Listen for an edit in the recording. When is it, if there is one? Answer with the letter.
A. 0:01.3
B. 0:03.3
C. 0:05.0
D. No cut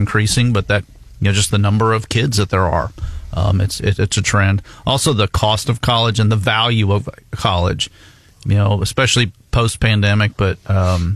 D